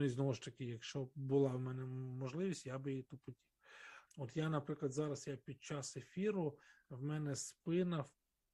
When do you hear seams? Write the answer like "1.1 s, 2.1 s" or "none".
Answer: 4.1 s